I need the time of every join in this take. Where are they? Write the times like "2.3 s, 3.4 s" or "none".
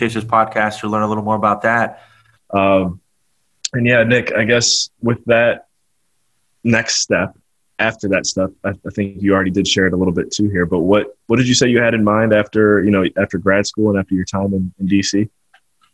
2.4 s